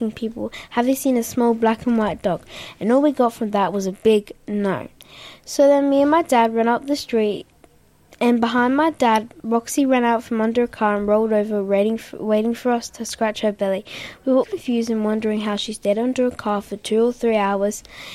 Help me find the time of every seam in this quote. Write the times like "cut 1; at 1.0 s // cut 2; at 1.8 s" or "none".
cut 1; at 14.4 s